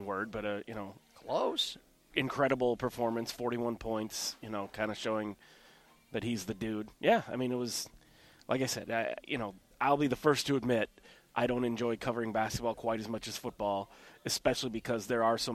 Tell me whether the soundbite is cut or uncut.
uncut